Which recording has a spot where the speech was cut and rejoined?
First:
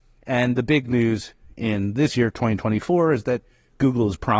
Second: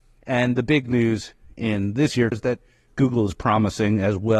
second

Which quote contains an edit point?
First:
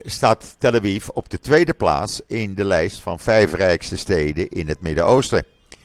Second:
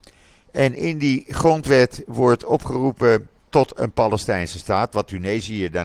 second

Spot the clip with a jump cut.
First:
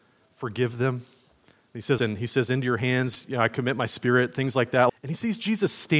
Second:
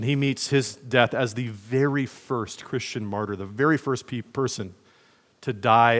first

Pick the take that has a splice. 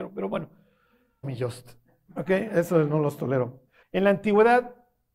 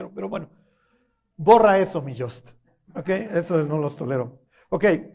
first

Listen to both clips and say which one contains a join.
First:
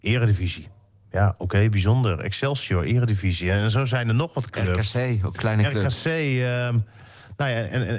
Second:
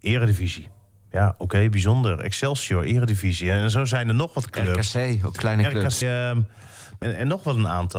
second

